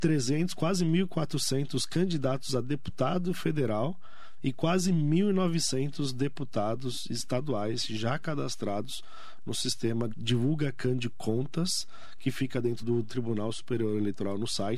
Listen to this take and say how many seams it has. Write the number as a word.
two